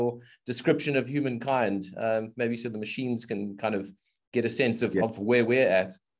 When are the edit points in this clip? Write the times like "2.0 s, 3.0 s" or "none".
none

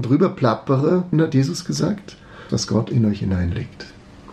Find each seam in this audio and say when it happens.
1.1 s, 2.5 s

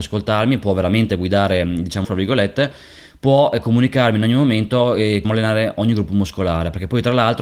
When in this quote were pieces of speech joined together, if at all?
2.0 s, 5.2 s

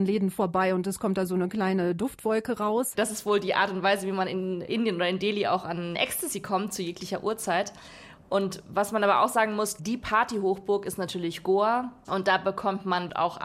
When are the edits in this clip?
2.9 s

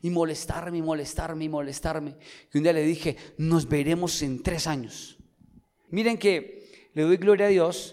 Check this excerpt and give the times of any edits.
5.9 s

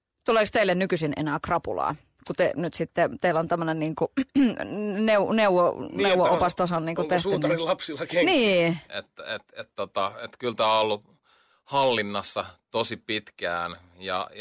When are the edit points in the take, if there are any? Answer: 8.9 s

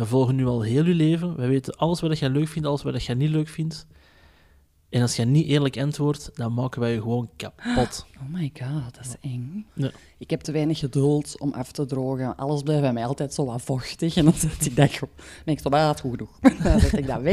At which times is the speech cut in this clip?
9.7 s

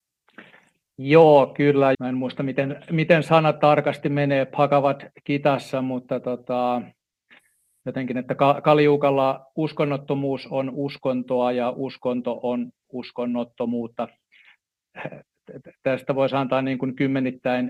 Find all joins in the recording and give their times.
1.9 s

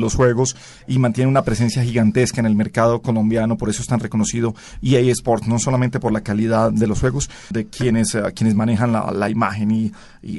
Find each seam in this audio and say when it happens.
7.5 s

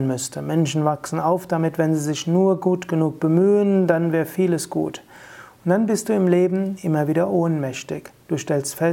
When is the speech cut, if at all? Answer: none

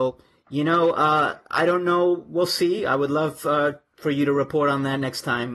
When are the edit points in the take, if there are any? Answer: none

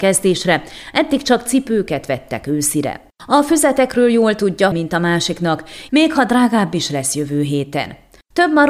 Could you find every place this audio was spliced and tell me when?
4.7 s, 5.9 s

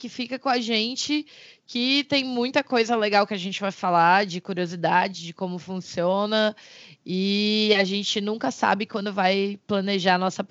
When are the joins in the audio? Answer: none

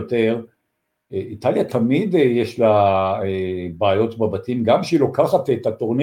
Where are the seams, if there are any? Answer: none

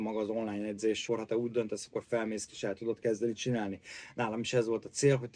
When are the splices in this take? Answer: 1.1 s, 2.5 s

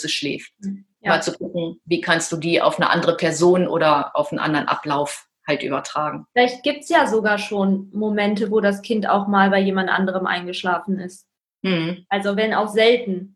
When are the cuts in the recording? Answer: none

